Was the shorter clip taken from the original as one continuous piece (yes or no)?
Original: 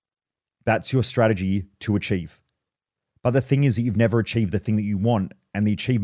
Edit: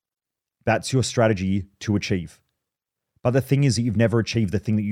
yes